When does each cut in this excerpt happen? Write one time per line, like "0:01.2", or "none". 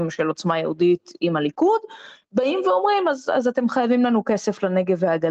none